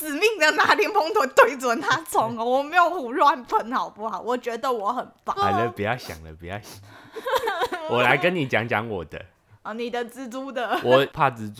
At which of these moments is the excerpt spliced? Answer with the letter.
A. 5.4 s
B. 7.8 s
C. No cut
A